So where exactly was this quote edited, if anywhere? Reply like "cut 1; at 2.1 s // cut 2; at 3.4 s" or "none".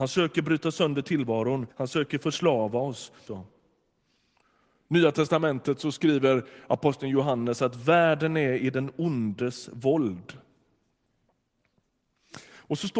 cut 1; at 1.7 s // cut 2; at 3.3 s